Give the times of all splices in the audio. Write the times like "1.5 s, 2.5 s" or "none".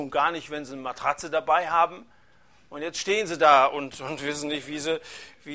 none